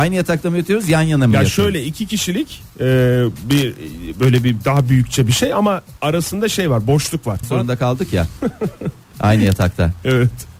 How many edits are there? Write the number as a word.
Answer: two